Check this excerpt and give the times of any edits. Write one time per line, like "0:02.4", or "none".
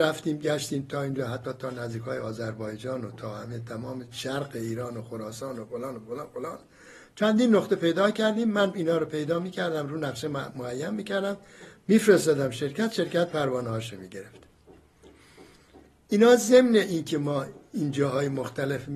none